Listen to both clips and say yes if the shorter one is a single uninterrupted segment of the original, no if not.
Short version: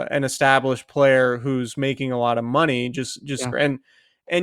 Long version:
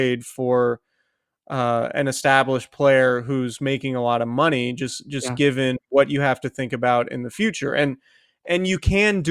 no